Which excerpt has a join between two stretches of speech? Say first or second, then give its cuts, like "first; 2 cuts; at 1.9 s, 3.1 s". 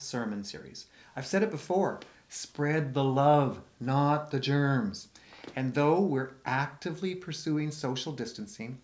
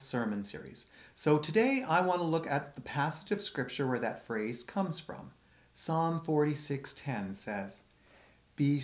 first; 1 cut; at 1.0 s